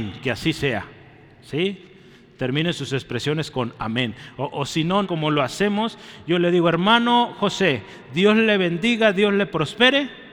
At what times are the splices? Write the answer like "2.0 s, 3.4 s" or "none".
5.0 s

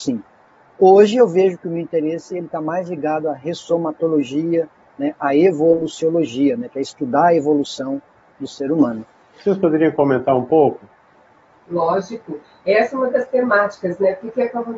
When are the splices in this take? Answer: 9.3 s

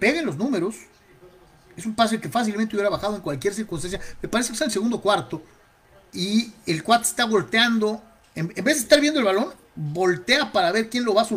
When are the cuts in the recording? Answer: none

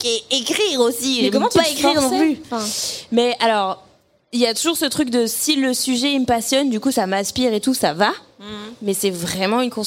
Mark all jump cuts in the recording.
none

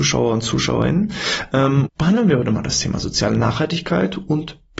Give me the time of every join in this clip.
1.9 s

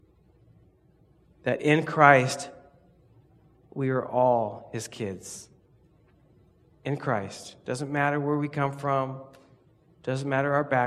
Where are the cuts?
none

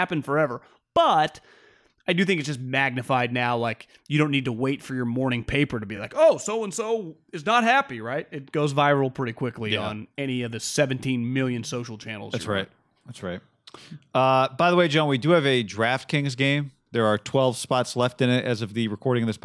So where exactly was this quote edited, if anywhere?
none

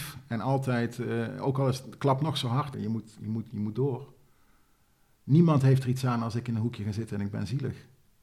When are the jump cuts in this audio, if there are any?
2.7 s

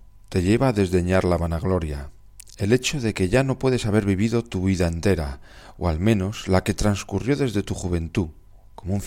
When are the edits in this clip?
none

